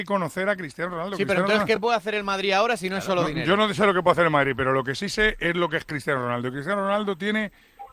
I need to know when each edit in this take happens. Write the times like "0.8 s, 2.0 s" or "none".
none